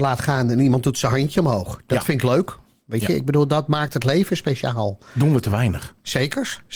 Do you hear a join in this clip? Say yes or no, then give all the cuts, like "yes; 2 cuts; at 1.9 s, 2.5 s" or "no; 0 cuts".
no; 0 cuts